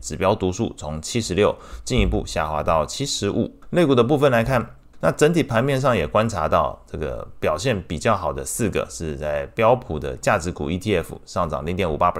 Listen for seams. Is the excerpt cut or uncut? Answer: cut